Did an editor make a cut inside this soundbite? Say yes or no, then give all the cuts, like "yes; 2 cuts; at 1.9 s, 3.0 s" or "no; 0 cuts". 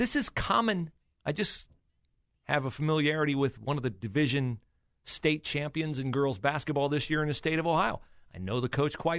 no; 0 cuts